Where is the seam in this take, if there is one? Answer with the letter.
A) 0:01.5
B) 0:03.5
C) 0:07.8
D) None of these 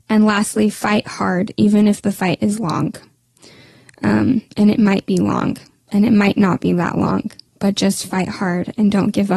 D